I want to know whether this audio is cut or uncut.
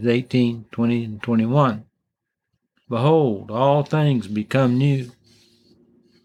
cut